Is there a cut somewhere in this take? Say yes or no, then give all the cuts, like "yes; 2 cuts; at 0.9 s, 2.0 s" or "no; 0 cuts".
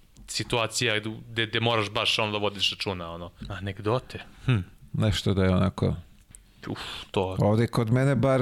yes; 1 cut; at 3.4 s